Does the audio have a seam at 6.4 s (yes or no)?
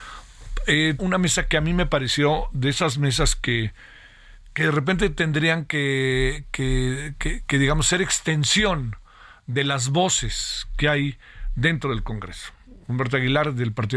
no